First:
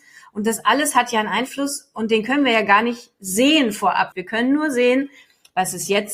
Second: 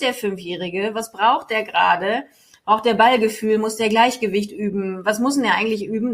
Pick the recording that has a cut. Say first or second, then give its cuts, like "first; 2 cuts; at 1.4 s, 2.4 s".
first; 1 cut; at 4.1 s